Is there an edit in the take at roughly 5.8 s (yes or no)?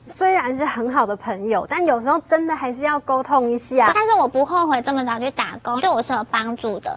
yes